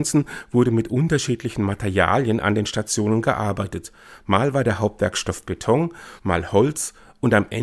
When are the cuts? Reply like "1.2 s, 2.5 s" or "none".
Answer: none